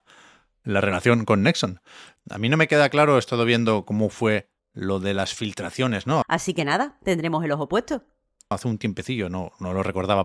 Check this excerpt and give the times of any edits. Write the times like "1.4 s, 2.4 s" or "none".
2.2 s, 6.2 s, 8.5 s